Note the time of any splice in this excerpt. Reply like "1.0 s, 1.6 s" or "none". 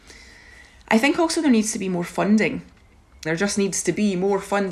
3.3 s